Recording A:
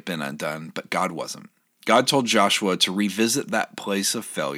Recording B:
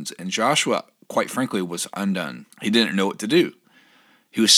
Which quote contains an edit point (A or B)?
B